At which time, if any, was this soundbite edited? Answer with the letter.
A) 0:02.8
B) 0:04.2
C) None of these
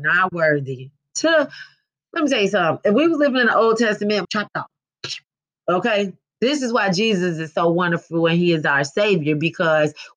B